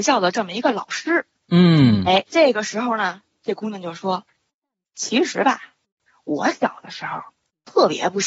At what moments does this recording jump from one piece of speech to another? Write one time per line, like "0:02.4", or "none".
0:02.3